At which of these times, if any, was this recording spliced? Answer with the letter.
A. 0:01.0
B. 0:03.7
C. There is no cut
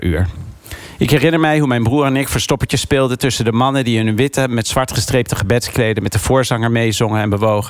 C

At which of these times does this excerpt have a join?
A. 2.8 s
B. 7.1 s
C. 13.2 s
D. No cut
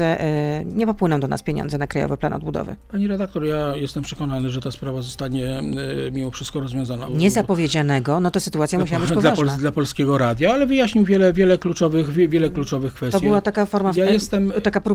B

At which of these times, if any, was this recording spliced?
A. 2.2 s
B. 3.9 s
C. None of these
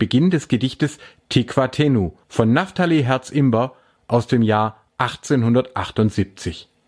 A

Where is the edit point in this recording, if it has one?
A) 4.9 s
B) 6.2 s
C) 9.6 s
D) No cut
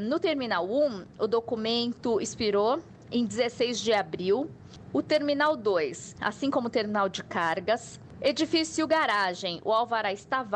B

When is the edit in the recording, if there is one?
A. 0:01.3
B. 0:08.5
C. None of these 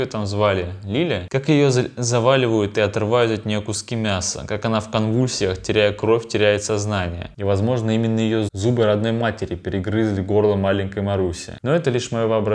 B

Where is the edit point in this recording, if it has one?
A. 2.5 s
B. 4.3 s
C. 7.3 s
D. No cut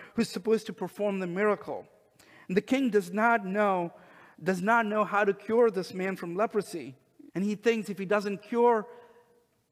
C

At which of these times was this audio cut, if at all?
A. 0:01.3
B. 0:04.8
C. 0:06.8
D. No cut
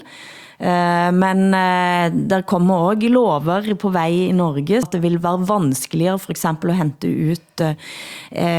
B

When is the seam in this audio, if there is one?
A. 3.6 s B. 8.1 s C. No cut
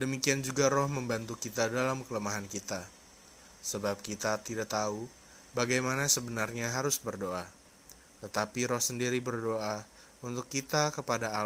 C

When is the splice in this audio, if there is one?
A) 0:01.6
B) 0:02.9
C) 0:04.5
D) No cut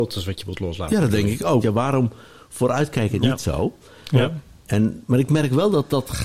A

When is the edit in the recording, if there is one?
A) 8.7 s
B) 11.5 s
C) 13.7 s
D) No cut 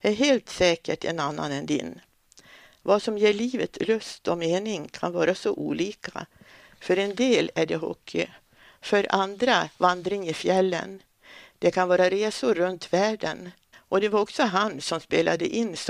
C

